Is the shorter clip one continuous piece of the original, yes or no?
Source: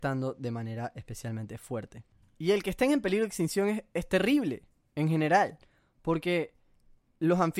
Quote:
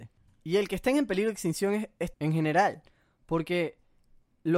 no